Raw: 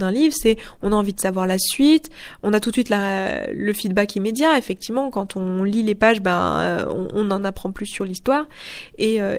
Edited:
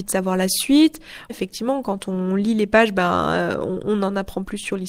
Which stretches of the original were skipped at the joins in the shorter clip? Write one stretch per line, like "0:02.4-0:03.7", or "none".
0:02.4-0:04.6